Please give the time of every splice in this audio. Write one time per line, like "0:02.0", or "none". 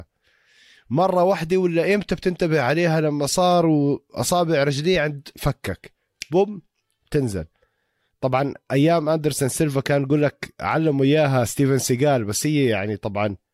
none